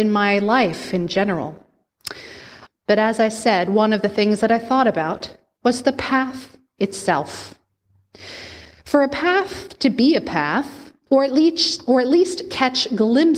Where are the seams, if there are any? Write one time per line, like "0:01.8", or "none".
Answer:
0:02.7
0:11.1